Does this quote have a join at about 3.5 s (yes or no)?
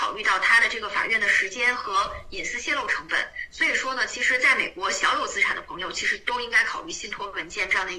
no